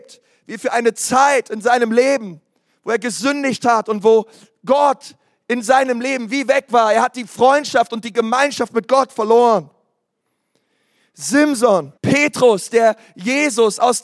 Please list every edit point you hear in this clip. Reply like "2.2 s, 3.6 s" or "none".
12.0 s